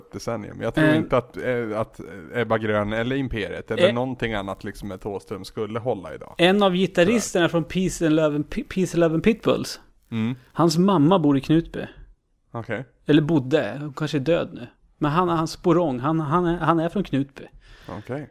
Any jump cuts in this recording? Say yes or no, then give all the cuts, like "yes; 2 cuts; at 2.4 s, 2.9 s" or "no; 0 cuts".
no; 0 cuts